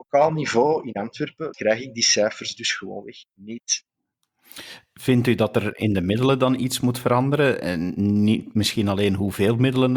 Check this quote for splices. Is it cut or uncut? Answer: cut